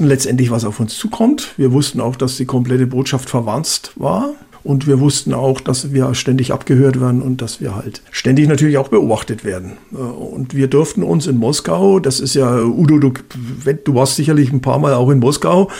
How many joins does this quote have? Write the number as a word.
zero